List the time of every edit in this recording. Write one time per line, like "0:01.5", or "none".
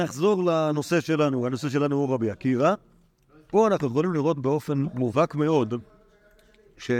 none

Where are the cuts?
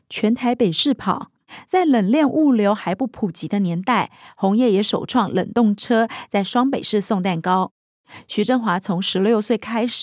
none

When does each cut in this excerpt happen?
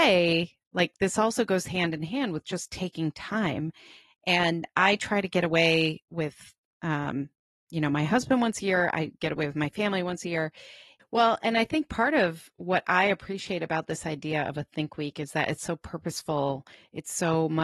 0:11.0

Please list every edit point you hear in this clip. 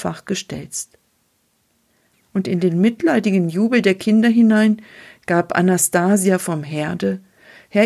0:02.1

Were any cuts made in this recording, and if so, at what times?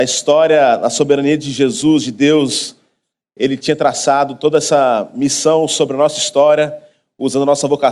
none

